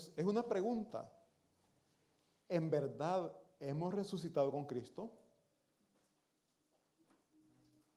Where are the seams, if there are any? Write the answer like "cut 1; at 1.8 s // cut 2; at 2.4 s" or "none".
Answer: none